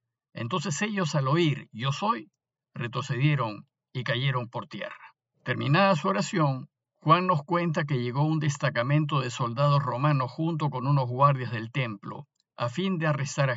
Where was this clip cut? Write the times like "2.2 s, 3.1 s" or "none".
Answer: 5.3 s